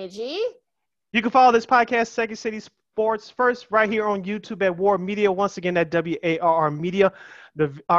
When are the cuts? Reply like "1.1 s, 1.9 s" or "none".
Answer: none